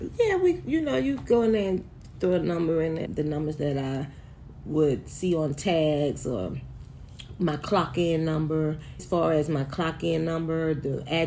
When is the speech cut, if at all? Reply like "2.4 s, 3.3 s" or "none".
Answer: 3.1 s, 9.0 s